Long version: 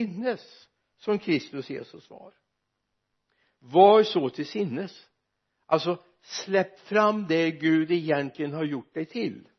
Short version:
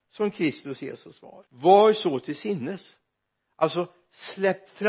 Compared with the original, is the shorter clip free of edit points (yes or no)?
no